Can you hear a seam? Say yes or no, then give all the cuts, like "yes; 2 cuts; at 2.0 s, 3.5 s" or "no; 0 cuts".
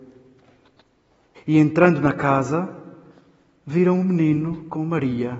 yes; 1 cut; at 1.4 s